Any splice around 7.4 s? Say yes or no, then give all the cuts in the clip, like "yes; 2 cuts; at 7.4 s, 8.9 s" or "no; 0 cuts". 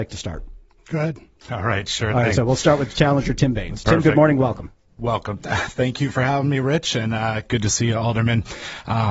no; 0 cuts